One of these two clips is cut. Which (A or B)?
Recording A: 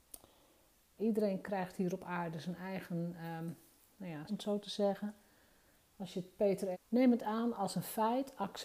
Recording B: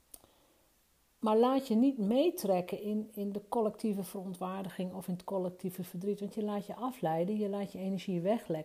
A